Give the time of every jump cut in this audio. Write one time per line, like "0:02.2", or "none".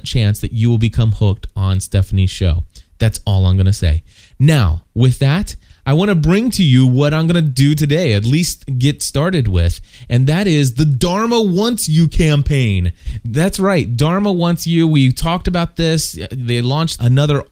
none